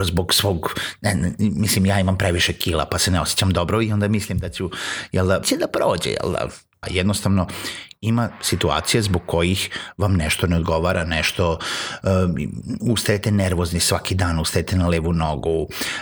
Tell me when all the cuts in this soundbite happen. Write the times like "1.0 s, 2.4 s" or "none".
5.4 s, 6.8 s, 12.8 s